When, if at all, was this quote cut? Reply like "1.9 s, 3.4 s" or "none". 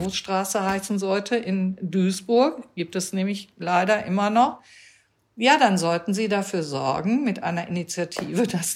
none